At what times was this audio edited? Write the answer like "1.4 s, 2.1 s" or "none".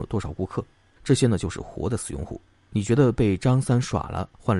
1.0 s, 2.6 s